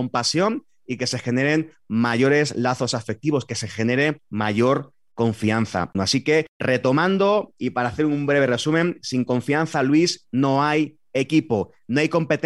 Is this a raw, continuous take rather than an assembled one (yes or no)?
no